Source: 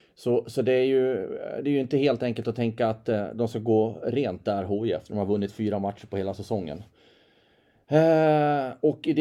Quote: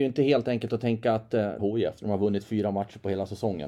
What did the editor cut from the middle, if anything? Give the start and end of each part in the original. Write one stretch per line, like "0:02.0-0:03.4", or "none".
0:03.3-0:04.7